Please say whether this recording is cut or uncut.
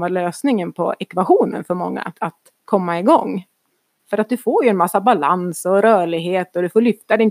cut